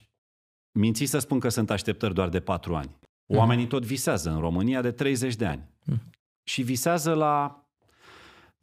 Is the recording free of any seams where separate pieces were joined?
yes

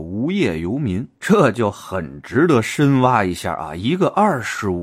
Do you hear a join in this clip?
no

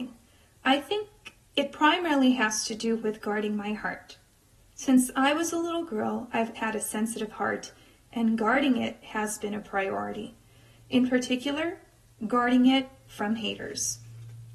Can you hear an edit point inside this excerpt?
yes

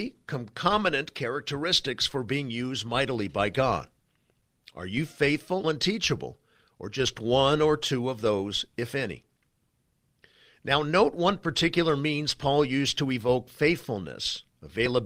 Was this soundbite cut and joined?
yes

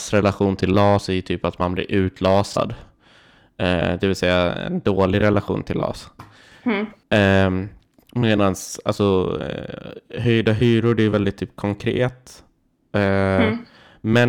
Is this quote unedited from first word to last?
yes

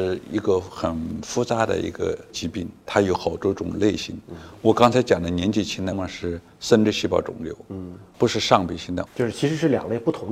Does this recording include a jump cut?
yes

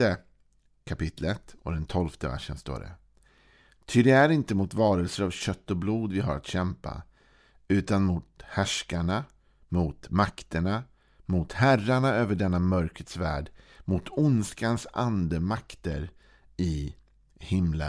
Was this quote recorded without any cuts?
yes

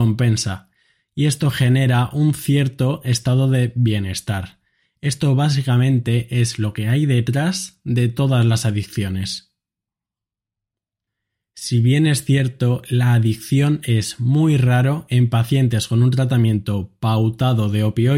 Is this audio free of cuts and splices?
yes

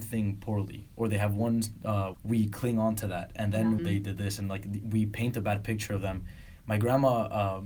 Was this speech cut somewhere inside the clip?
yes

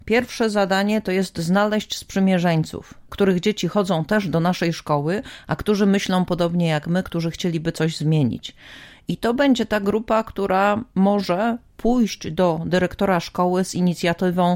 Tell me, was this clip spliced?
yes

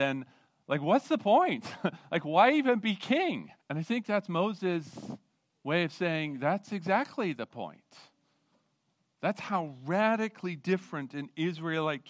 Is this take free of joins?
no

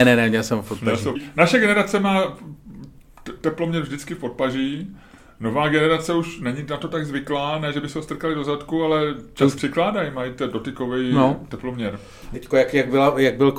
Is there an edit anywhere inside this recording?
yes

